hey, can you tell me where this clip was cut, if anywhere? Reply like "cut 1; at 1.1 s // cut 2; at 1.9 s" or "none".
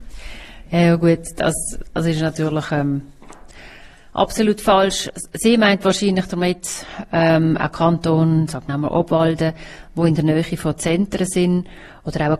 cut 1; at 8.7 s